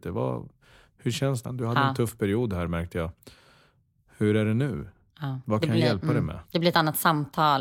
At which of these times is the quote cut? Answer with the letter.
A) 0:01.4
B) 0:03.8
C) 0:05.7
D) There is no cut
A